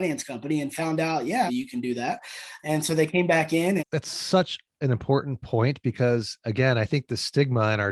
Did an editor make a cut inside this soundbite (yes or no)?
yes